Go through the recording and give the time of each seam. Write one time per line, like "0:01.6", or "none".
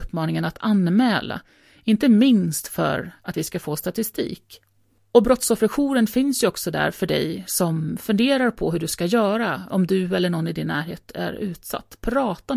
0:09.7